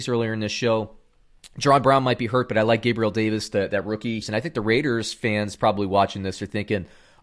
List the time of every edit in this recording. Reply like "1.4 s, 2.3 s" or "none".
4.2 s